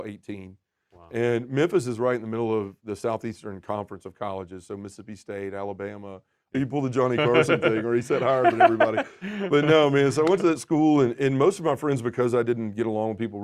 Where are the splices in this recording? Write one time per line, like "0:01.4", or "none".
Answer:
0:06.5